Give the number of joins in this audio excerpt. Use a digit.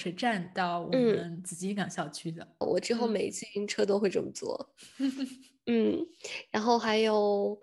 1